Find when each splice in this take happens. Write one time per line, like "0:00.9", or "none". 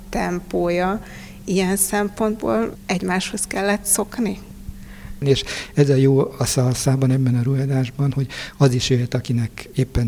0:05.2